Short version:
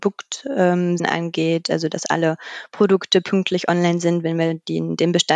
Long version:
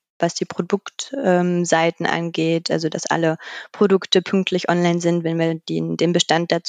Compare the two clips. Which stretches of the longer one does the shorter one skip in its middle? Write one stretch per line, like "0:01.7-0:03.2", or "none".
0:01.7-0:02.0